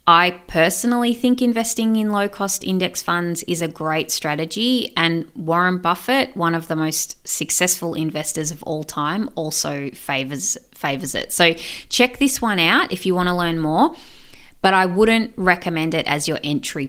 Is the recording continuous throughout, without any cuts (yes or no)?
yes